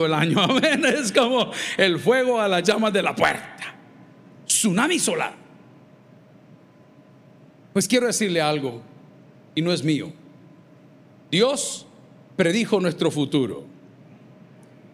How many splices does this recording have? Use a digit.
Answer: 0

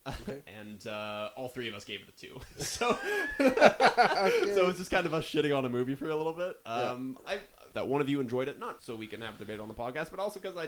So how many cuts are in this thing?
2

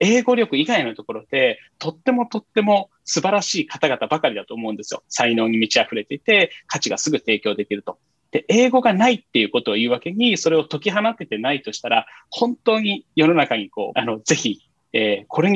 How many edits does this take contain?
1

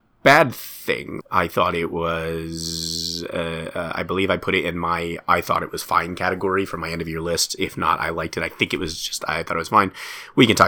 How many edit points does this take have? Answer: 1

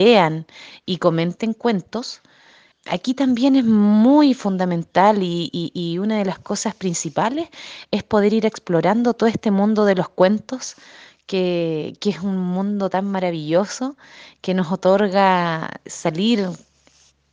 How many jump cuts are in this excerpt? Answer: 1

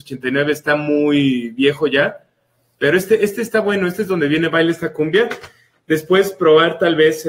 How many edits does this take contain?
0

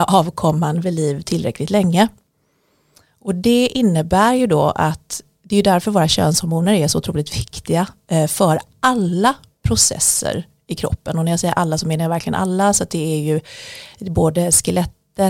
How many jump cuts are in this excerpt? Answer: 0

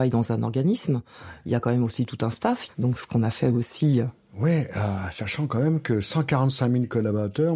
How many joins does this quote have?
1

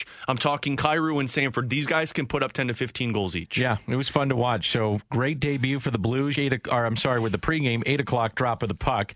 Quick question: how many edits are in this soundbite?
1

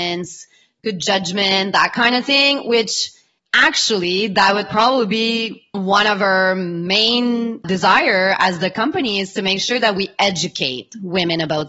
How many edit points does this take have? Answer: 2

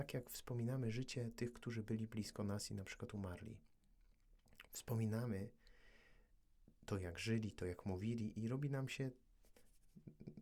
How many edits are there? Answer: 0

